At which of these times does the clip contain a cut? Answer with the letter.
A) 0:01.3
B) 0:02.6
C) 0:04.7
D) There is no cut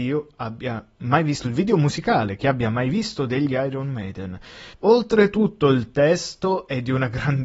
C